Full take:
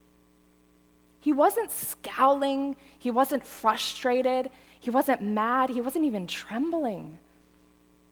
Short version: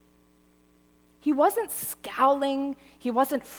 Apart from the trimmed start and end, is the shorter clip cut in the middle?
no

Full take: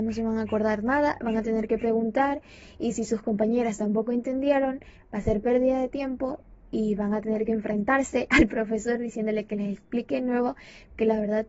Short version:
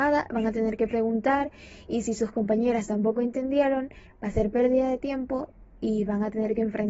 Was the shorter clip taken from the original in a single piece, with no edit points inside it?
yes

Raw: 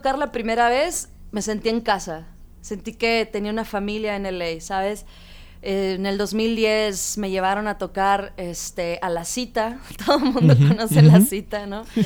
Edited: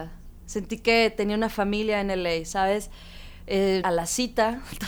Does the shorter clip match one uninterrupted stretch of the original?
no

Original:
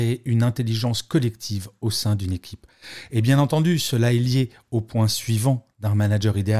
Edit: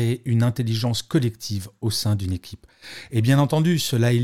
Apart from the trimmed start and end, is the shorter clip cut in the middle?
no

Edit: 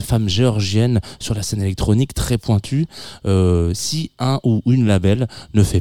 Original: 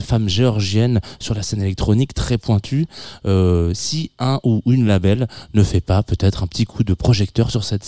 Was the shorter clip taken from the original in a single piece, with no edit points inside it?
yes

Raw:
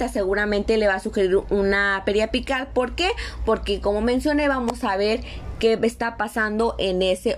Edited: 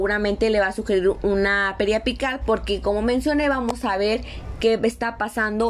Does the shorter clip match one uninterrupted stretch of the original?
no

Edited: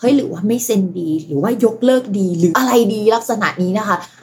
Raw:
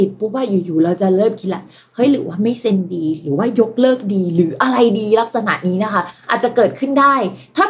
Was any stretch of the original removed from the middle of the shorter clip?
yes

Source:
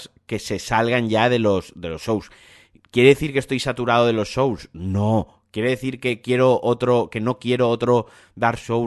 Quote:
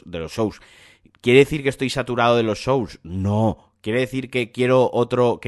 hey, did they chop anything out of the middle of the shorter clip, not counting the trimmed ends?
no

